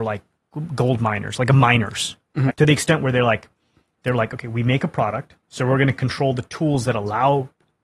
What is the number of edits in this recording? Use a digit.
2